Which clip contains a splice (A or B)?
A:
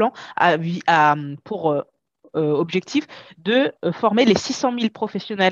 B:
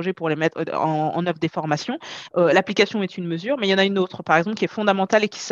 B